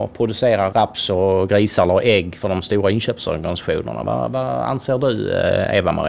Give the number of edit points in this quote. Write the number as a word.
zero